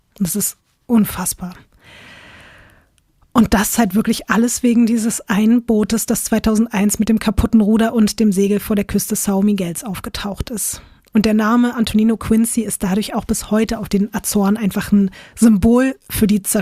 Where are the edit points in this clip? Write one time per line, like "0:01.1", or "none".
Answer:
none